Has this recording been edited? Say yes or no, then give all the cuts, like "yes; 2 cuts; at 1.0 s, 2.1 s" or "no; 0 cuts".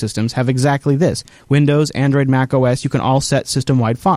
no; 0 cuts